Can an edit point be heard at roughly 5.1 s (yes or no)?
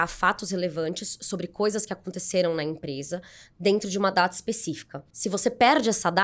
yes